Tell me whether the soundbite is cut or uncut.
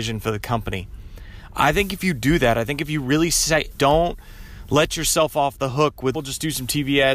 cut